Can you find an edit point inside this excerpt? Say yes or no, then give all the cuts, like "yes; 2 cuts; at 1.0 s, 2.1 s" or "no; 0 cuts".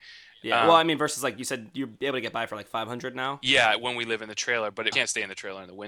yes; 1 cut; at 4.9 s